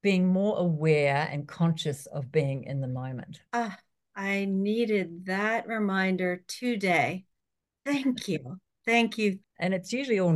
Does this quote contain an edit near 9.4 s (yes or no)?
yes